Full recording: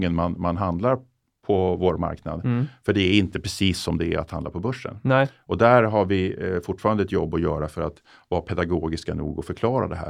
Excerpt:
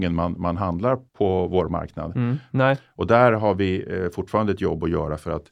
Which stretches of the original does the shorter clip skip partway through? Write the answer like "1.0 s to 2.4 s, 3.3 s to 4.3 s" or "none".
1.1 s to 1.4 s, 2.8 s to 5.0 s

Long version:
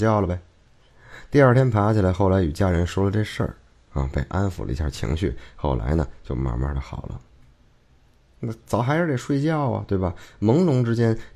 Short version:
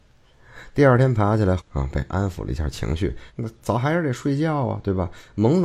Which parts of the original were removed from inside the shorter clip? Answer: 2.1 s to 3.8 s, 5.5 s to 8.3 s

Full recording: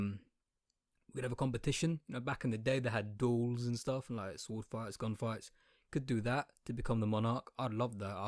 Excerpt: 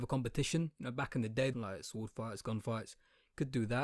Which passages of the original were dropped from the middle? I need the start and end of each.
2.8 s to 4.1 s

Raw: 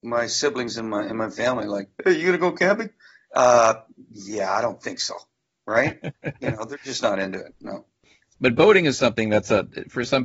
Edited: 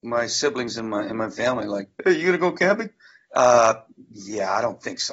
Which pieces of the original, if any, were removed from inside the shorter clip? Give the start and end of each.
none

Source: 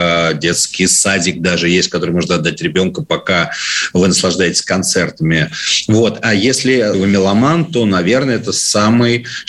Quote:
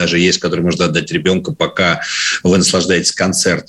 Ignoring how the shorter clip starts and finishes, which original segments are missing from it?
none

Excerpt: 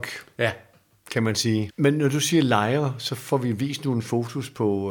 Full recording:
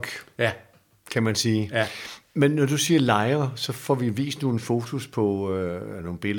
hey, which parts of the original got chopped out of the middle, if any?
1.7 s to 2.3 s

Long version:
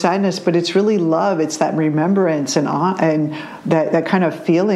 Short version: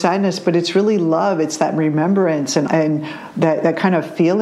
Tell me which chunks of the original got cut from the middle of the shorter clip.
2.7 s to 3.0 s

